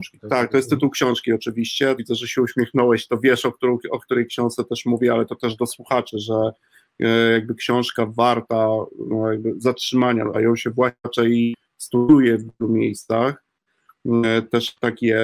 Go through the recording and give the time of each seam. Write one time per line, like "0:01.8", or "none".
0:02.0
0:10.3